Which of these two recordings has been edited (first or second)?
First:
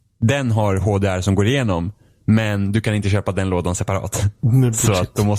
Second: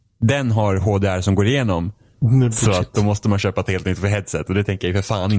second